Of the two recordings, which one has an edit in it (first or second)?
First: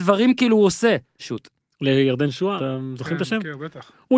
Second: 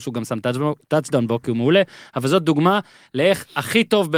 first